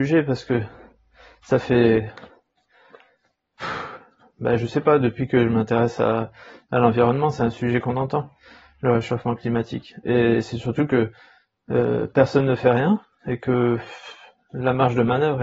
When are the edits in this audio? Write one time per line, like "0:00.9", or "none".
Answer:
none

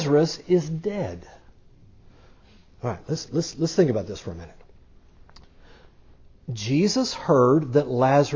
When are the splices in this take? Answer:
0:03.5

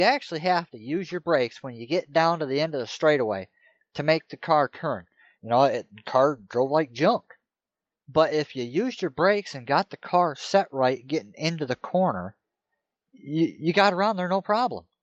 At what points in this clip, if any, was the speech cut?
0:05.4

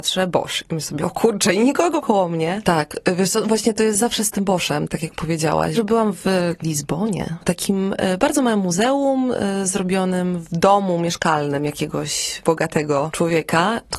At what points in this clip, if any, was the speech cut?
0:02.6
0:05.7

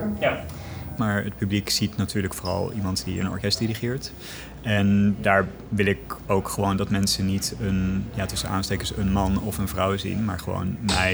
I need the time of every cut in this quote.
0:01.0

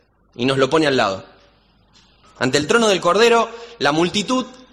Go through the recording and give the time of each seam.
0:02.2

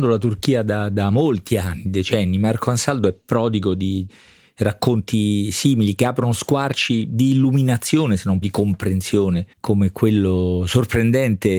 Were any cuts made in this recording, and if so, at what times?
0:08.4
0:09.5

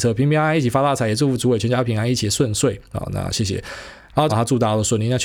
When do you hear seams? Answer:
0:04.3

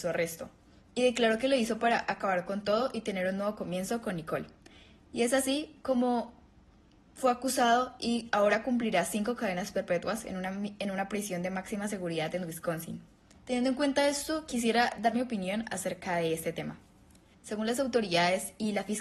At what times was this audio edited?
0:13.4
0:17.3

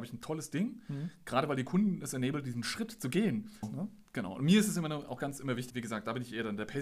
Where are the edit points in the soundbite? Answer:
0:03.6
0:05.7

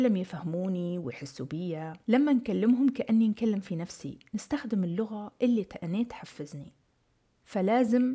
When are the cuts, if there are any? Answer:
0:02.0

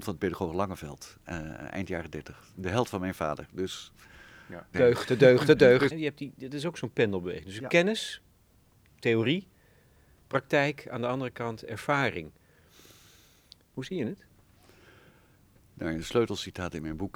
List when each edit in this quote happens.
0:04.7
0:05.9

